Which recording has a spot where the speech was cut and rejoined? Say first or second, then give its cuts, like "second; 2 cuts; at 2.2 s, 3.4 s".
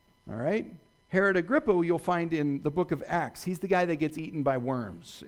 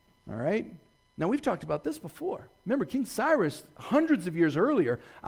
second; 1 cut; at 1.0 s